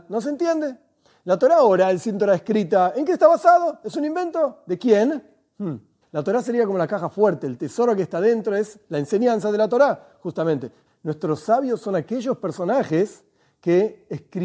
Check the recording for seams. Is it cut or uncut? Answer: cut